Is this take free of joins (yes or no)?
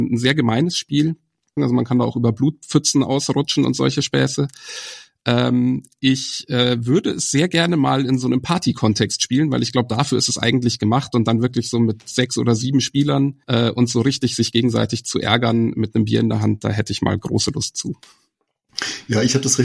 no